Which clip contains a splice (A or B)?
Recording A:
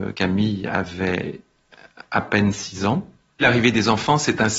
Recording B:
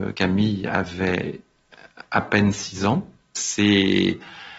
A